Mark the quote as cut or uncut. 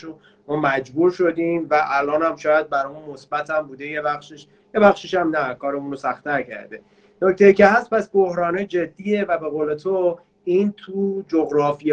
uncut